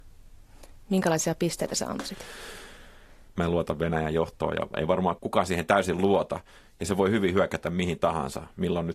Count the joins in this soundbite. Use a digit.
1